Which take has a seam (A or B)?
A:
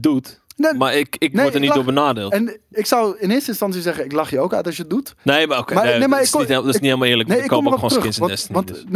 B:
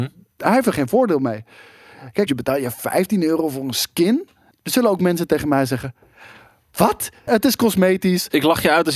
B